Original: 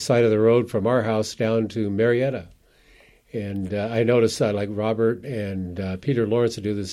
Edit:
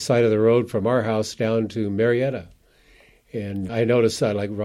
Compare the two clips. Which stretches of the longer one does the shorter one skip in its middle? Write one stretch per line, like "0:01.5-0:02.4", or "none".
0:03.7-0:03.9